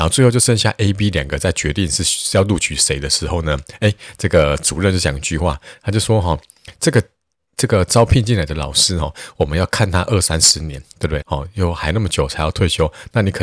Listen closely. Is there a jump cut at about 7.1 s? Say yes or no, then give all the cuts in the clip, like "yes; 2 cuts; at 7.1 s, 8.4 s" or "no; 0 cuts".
no; 1 cut; at 11.2 s